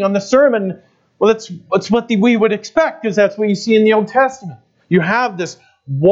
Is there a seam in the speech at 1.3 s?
no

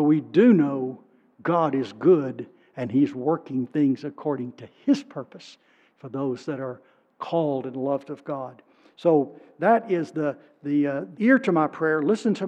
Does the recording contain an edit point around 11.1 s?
yes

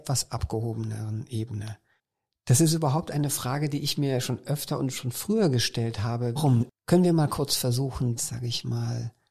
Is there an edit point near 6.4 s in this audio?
yes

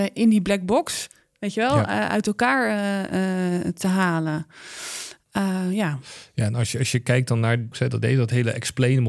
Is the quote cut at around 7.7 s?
yes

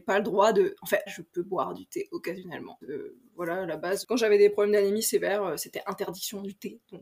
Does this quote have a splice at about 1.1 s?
yes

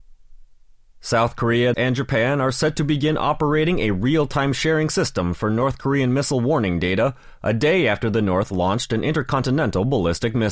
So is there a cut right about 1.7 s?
yes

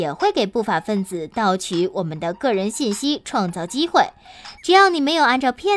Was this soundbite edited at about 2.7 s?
no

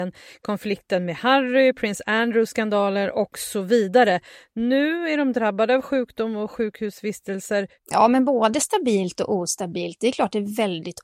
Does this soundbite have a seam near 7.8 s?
yes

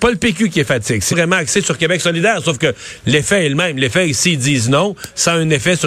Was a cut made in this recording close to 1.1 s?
yes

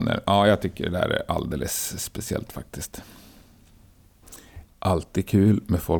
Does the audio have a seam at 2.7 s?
no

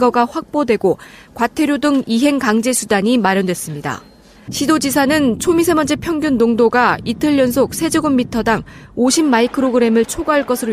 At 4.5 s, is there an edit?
yes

